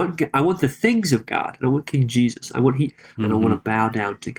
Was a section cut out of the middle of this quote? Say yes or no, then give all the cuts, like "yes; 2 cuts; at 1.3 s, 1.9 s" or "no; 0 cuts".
yes; 2 cuts; at 1.6 s, 3.2 s